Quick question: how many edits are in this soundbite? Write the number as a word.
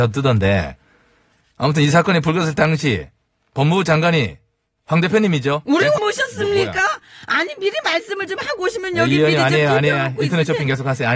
one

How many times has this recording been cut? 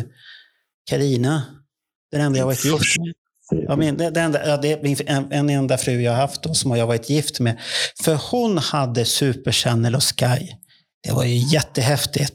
zero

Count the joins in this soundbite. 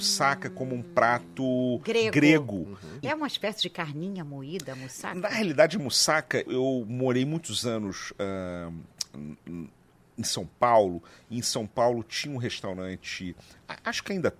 two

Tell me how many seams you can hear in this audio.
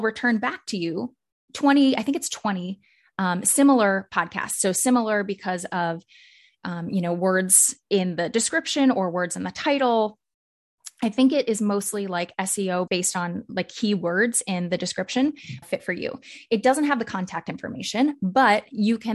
two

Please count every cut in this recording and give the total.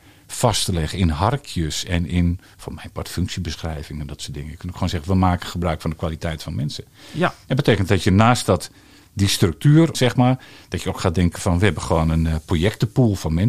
one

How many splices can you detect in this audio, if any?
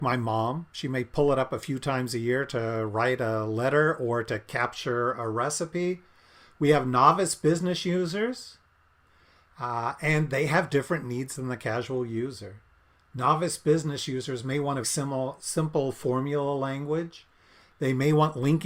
one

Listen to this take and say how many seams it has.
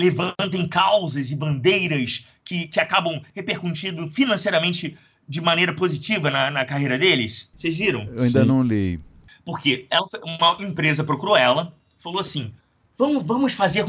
one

